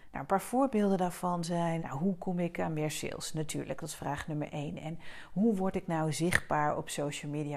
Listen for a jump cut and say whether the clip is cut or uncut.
cut